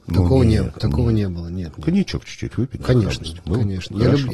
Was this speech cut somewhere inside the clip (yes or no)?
no